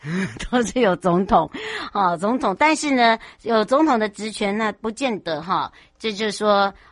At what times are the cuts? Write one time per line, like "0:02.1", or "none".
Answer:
none